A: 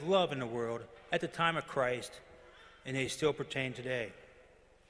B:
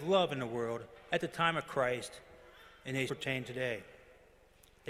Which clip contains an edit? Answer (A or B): B